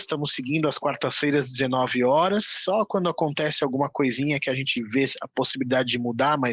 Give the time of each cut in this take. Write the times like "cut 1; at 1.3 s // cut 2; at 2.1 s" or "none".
none